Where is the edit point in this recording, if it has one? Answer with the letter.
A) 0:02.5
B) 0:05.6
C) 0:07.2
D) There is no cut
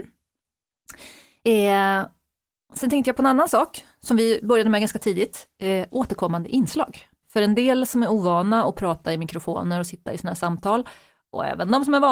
C